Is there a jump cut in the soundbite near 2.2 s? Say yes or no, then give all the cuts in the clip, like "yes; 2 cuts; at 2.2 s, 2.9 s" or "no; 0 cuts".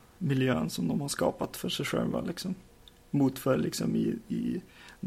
no; 0 cuts